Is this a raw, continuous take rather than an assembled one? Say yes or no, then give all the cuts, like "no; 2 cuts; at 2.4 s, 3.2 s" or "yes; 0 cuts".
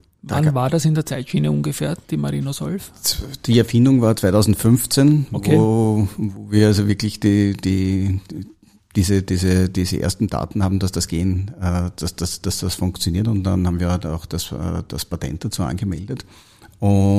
yes; 0 cuts